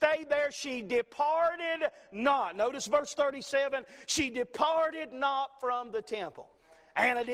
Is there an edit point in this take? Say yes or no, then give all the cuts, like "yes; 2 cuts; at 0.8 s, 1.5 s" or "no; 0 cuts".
no; 0 cuts